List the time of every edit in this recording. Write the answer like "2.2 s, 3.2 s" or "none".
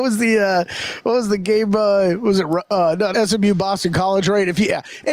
3.1 s